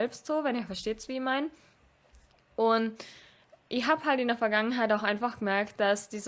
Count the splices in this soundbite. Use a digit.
0